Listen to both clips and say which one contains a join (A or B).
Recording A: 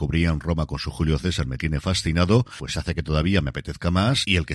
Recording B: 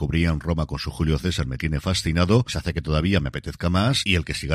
B